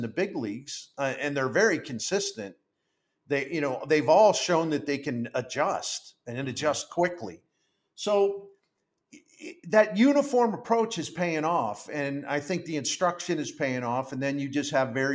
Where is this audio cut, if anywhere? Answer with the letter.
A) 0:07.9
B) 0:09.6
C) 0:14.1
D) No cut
B